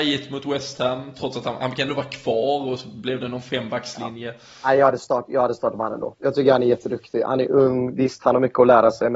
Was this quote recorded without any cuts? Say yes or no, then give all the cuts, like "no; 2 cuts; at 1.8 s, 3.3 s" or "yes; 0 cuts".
yes; 0 cuts